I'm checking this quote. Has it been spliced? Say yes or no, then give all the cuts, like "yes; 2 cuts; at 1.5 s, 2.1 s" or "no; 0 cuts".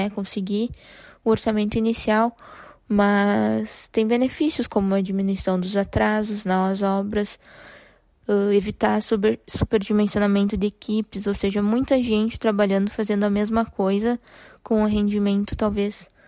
no; 0 cuts